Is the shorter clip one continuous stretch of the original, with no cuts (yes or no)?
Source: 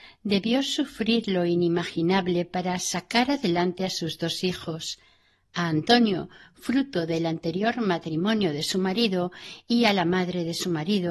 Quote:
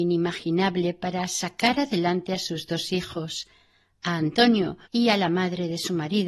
no